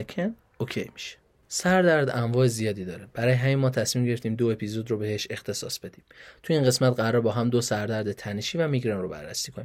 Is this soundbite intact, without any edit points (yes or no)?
yes